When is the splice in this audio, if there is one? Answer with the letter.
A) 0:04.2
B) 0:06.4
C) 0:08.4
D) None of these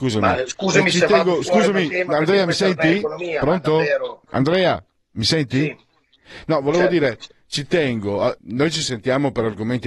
C